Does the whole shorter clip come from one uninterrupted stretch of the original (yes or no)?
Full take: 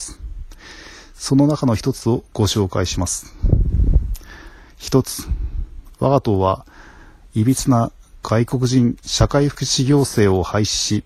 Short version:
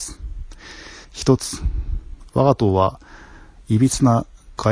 no